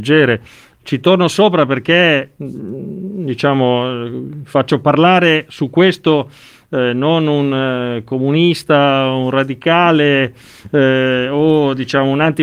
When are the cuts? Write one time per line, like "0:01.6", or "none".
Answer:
none